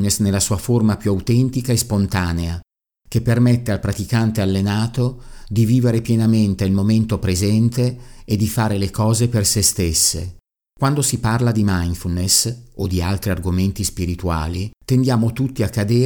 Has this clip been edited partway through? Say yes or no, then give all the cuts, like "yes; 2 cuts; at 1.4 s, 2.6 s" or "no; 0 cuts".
yes; 2 cuts; at 10.6 s, 14.8 s